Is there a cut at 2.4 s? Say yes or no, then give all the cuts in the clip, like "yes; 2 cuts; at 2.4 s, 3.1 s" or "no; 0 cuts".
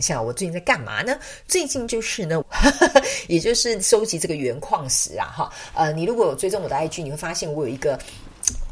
yes; 1 cut; at 2.4 s